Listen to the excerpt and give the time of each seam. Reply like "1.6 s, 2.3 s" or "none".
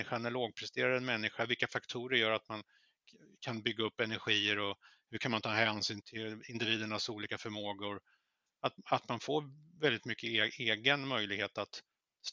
6.0 s, 8.6 s